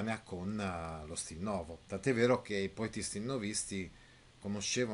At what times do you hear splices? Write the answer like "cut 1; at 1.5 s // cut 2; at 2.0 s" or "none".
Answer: cut 1; at 1.8 s